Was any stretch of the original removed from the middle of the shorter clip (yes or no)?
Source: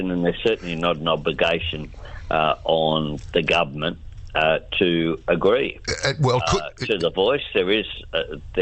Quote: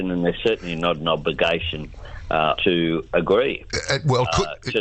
yes